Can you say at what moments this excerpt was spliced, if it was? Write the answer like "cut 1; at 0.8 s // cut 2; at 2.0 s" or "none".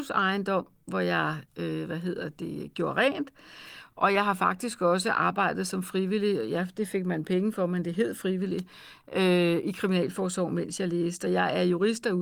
none